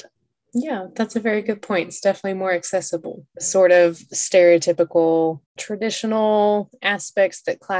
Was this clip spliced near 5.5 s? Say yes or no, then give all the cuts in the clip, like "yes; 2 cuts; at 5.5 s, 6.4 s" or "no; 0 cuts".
yes; 2 cuts; at 3.3 s, 5.5 s